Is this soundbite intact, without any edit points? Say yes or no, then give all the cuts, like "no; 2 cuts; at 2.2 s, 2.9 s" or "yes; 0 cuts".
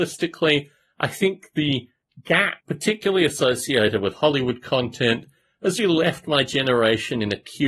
no; 2 cuts; at 2.6 s, 5.8 s